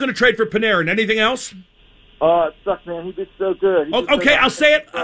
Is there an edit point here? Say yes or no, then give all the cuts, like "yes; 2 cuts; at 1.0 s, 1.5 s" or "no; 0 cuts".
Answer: no; 0 cuts